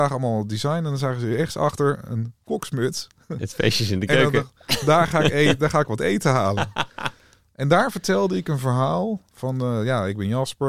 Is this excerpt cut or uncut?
uncut